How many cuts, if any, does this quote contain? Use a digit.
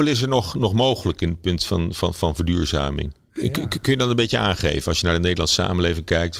1